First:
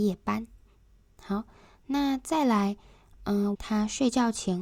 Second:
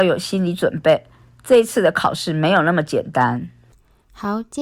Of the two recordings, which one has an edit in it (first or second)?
first